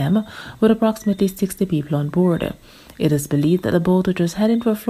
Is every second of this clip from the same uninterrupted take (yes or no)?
yes